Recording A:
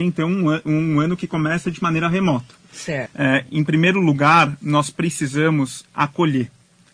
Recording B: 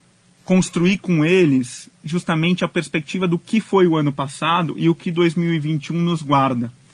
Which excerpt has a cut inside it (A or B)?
A